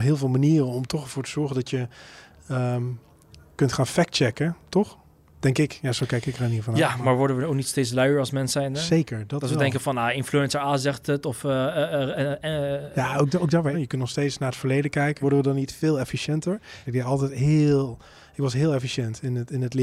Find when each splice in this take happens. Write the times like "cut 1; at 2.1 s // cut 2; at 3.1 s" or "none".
cut 1; at 13.7 s // cut 2; at 15.2 s // cut 3; at 16.8 s